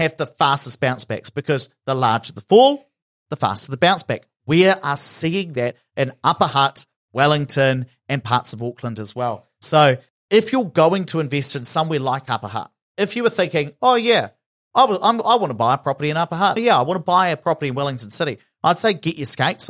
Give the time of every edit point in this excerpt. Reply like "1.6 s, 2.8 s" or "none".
16.6 s